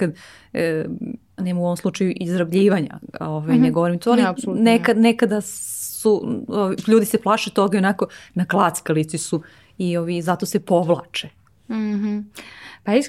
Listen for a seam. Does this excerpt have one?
yes; 1 cut; at 1.4 s

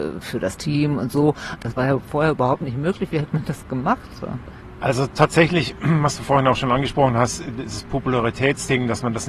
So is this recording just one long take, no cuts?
no; 1 cut; at 1.6 s

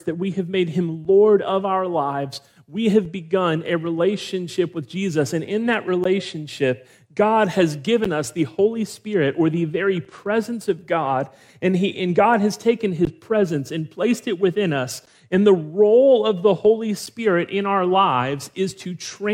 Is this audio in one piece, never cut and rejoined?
yes; 0 cuts

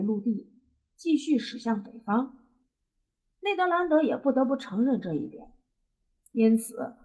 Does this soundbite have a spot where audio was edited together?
yes; 1 cut; at 3.3 s

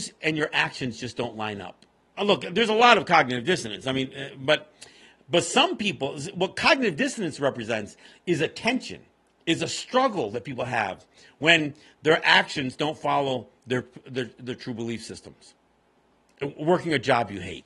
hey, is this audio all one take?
no; 1 cut; at 2.1 s

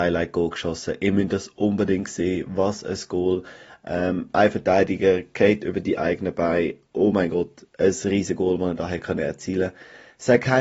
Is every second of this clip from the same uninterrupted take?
yes; 0 cuts

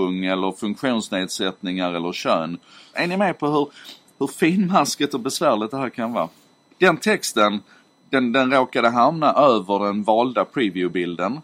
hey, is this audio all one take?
no; 2 cuts; at 2.9 s, 6.7 s

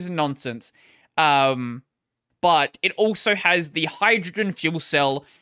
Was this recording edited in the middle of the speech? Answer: yes; 1 cut; at 2.3 s

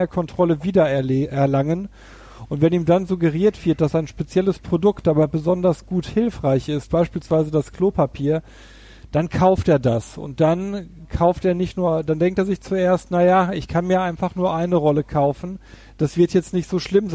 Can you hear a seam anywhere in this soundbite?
no; 0 cuts

